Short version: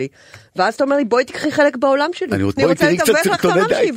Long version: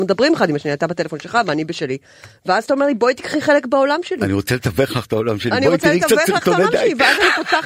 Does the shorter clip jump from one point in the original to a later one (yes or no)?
yes